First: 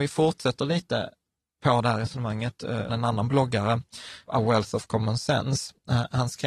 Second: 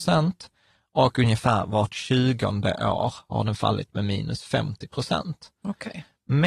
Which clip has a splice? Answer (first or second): first